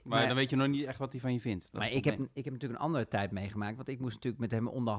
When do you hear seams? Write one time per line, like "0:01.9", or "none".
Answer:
none